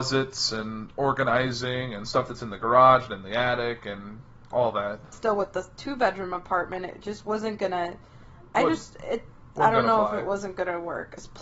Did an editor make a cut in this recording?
yes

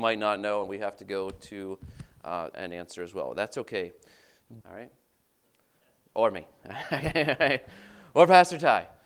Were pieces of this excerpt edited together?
yes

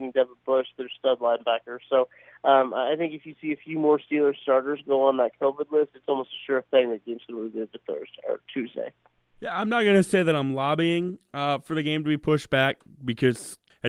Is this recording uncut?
yes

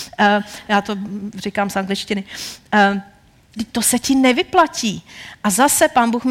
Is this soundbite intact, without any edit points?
no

